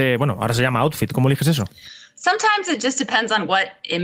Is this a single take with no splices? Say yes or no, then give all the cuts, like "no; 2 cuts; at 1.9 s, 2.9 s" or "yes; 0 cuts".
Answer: yes; 0 cuts